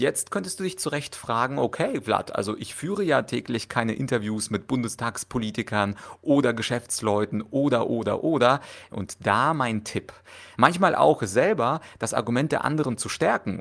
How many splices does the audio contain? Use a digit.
2